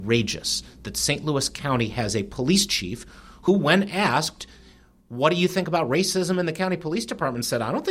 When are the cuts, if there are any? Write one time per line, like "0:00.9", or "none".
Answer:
none